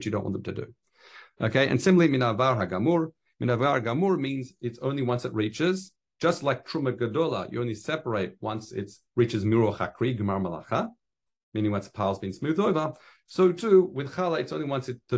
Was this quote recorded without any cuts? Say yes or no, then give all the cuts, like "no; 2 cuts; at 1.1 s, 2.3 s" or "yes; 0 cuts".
yes; 0 cuts